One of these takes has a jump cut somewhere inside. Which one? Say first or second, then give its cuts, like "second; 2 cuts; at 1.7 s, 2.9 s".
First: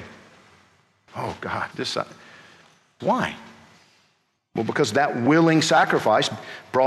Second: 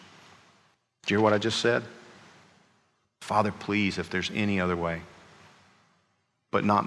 first; 2 cuts; at 1.1 s, 3.0 s